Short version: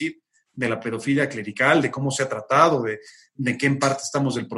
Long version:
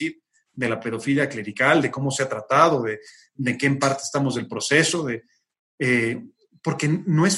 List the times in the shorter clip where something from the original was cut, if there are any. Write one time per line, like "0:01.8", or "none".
none